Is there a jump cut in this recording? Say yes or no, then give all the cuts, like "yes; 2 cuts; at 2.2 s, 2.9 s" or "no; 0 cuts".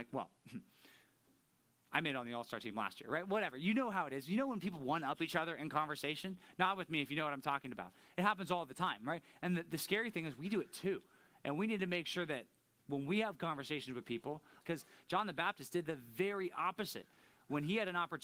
yes; 1 cut; at 14.6 s